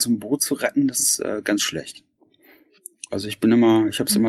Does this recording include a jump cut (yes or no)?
no